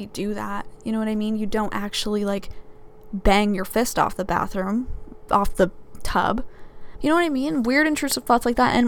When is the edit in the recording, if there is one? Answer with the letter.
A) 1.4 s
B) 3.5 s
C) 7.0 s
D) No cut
C